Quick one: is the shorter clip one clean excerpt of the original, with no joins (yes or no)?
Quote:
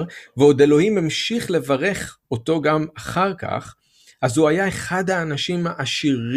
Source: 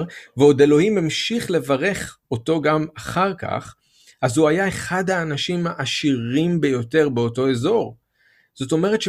yes